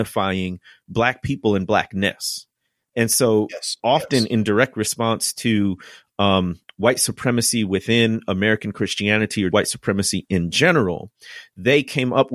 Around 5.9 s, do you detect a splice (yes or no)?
no